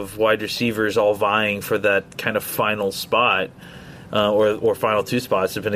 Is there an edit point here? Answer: no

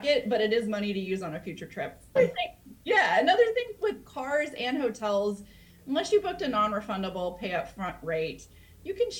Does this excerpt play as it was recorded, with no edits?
no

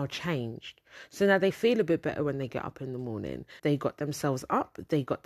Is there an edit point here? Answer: yes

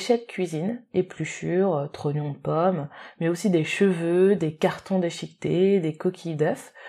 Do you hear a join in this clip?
no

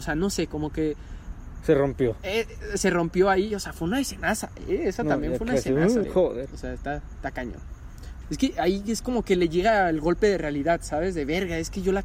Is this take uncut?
no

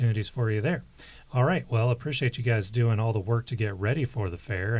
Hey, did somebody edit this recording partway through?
no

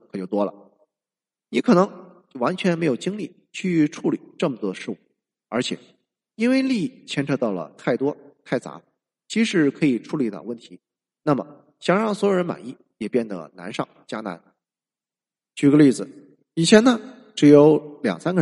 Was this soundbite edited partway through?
no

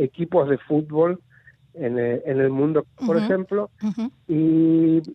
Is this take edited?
yes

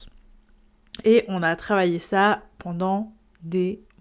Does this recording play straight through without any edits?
yes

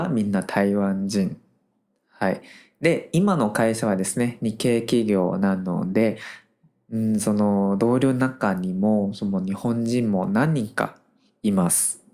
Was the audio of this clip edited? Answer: no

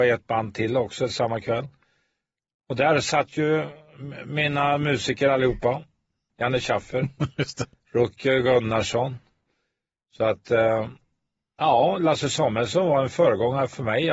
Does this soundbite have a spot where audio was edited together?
yes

